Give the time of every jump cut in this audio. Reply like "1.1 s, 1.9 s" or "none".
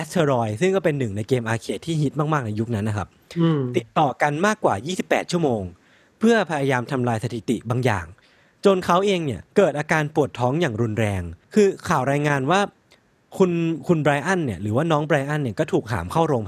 9.5 s, 11.4 s